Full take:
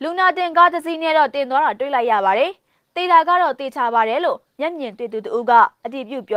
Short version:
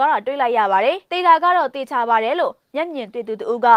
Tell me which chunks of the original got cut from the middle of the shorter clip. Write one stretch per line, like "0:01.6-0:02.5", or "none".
0:02.6-0:02.9